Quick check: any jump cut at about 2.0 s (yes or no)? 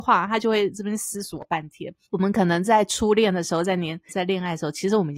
yes